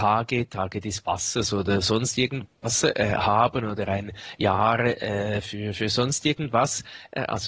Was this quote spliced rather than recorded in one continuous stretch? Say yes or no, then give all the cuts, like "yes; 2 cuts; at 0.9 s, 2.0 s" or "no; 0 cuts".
no; 0 cuts